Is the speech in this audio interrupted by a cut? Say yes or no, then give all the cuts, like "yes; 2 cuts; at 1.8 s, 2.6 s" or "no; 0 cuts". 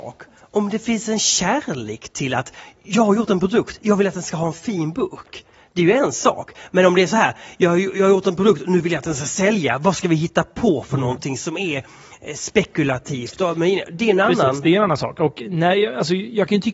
no; 0 cuts